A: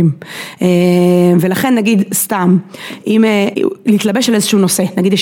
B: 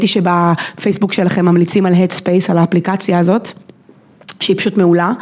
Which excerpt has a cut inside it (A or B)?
A